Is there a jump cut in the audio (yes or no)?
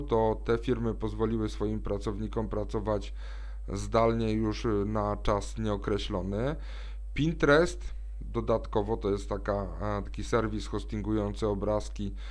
no